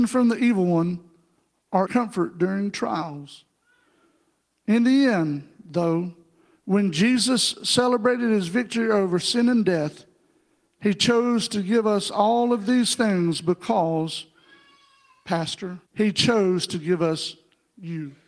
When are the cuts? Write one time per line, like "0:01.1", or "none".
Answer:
0:01.8
0:15.8